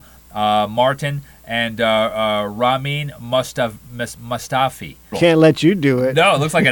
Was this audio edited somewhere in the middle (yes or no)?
yes